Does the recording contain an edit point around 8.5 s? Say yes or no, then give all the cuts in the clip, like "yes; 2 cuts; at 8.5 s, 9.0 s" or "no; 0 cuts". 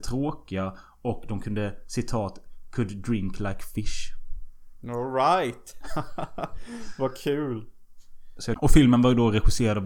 yes; 1 cut; at 8.5 s